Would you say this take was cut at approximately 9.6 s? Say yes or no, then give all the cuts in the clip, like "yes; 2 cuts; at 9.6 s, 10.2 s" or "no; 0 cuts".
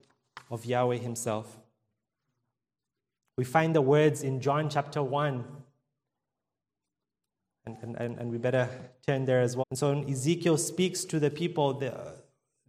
yes; 1 cut; at 9.6 s